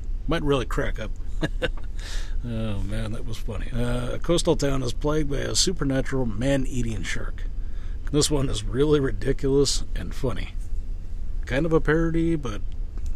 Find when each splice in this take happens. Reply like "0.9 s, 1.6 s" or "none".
3.7 s, 8.1 s